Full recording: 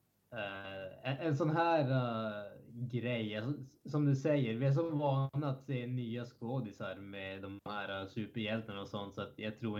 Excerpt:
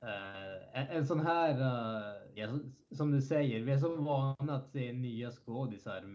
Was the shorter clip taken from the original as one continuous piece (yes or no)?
no